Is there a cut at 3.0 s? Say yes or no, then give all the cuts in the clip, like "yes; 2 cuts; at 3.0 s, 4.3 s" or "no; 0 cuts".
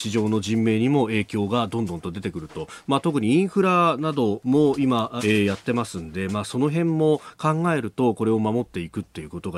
no; 1 cut; at 5.2 s